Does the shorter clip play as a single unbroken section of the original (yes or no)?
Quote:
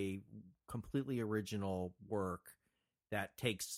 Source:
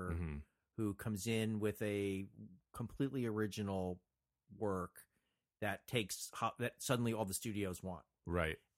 no